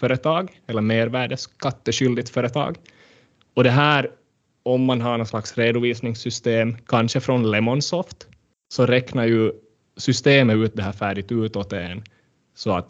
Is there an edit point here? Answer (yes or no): no